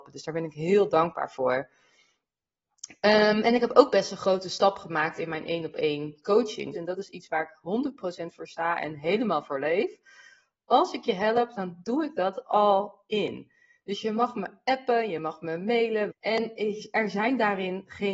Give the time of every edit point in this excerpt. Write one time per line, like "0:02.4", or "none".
0:06.7
0:16.1